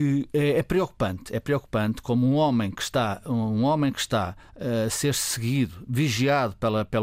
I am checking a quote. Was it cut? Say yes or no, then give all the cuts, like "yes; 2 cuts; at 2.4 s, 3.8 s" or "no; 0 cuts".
no; 0 cuts